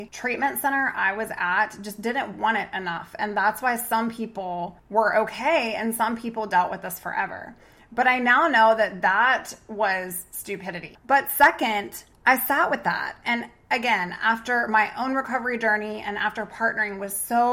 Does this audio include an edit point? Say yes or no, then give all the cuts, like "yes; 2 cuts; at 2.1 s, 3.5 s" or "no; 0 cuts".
yes; 1 cut; at 10.9 s